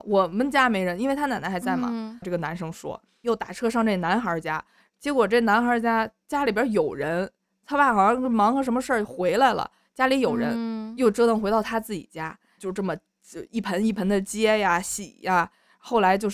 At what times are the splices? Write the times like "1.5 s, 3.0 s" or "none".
2.2 s